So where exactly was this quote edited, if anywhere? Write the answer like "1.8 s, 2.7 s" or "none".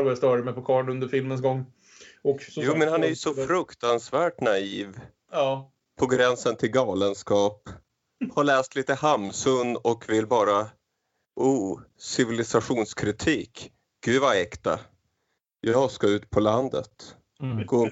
none